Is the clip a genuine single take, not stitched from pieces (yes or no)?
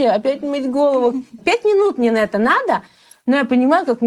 no